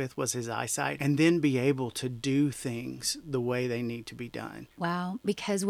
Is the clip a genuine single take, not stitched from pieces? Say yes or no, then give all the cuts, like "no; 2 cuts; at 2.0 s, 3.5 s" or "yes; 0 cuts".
no; 1 cut; at 1.0 s